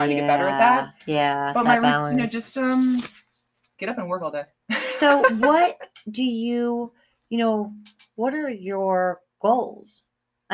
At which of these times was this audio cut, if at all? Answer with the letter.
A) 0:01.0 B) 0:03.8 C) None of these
B